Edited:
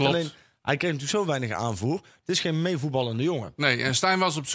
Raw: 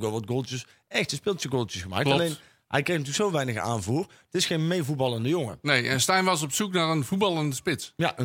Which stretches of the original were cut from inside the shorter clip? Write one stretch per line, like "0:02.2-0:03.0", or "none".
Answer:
none